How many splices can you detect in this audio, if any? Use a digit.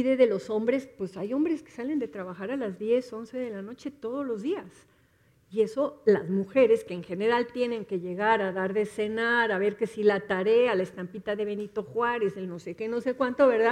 0